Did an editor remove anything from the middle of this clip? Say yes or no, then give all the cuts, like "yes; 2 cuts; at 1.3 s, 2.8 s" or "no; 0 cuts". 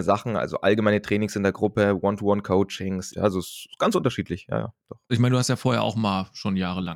yes; 2 cuts; at 3.1 s, 5.1 s